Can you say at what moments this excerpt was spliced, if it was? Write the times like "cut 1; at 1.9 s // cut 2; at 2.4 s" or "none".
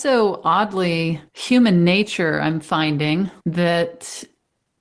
cut 1; at 1.3 s // cut 2; at 3.4 s

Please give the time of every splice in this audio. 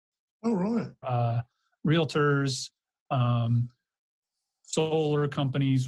cut 1; at 1.0 s

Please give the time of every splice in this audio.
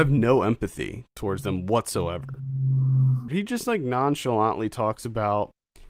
cut 1; at 3.3 s

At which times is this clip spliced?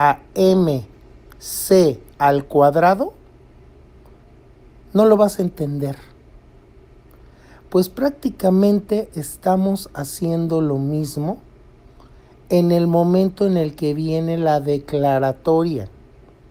none

